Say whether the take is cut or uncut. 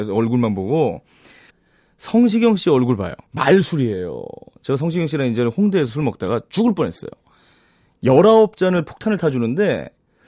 cut